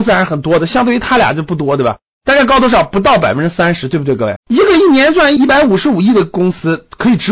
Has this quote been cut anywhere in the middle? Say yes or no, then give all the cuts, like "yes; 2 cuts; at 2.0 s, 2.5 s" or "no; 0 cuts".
yes; 1 cut; at 4.4 s